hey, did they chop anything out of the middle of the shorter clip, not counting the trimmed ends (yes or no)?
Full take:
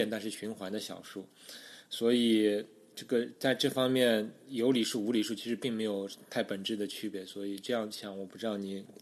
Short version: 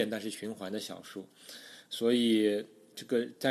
no